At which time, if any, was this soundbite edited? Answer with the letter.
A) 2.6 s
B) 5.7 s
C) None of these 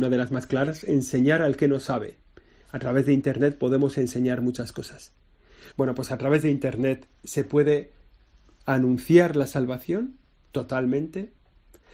B